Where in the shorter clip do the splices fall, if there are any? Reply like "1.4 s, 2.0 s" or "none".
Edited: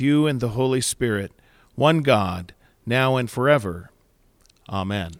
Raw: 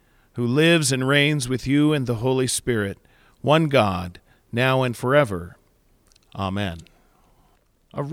none